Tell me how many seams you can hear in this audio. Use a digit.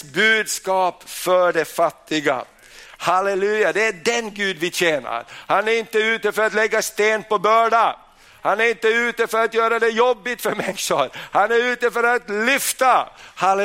0